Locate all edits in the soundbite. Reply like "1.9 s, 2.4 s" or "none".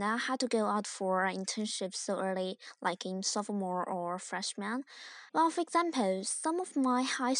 5.3 s